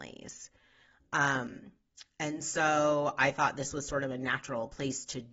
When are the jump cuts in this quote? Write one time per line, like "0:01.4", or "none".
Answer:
none